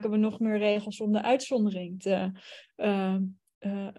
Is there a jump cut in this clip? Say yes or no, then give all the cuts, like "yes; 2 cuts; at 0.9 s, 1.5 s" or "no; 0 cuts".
no; 0 cuts